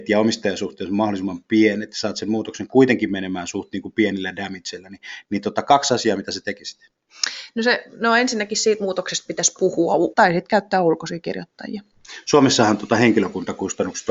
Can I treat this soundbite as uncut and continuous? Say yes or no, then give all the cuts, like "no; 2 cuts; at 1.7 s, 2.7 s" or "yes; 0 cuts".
no; 1 cut; at 10.1 s